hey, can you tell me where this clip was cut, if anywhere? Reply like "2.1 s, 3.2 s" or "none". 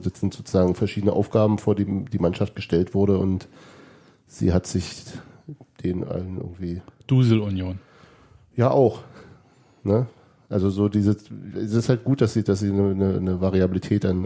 none

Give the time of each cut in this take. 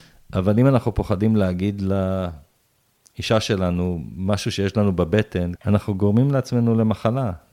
5.6 s

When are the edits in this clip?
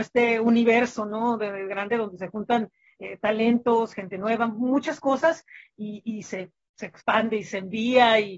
7.0 s

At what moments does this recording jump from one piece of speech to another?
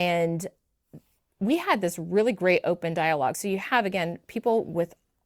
none

